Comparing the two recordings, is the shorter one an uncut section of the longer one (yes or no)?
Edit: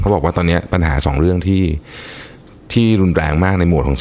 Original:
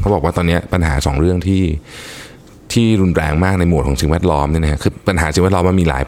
yes